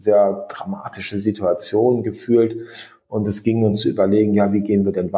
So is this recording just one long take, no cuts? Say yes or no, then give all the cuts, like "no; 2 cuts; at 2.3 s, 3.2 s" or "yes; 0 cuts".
yes; 0 cuts